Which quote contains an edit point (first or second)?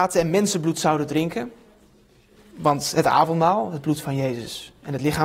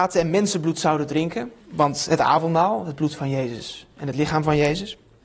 second